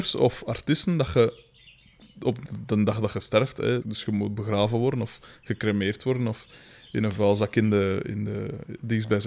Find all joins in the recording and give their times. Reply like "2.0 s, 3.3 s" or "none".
3.8 s

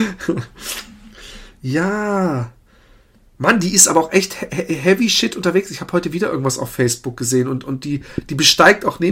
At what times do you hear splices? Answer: none

